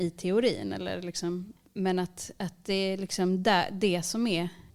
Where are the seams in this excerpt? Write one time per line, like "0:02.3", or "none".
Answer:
none